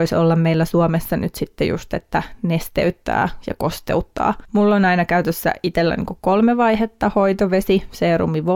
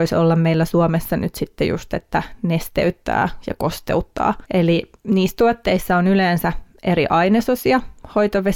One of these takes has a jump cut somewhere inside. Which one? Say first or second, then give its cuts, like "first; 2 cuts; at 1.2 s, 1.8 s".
first; 1 cut; at 4.4 s